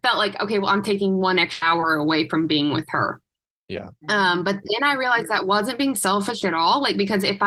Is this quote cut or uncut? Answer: uncut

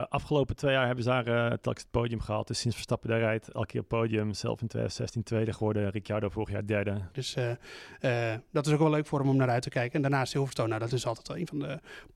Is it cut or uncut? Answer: cut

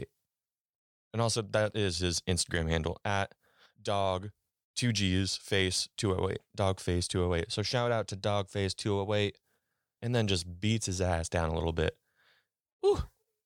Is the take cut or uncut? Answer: cut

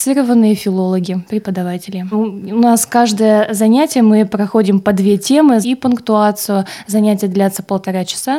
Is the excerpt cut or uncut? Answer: cut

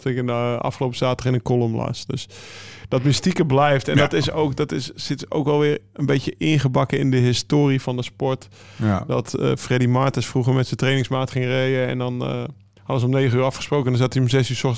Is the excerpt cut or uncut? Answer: uncut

